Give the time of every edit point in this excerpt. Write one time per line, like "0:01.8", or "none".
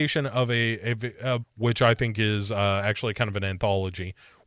0:01.4